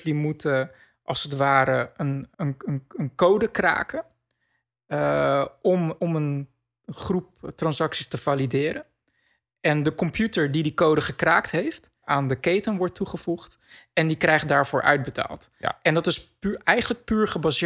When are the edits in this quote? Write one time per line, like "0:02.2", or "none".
0:02.3
0:06.0
0:12.0